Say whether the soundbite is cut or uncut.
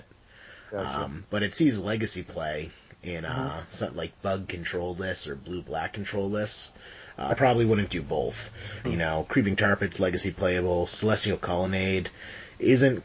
cut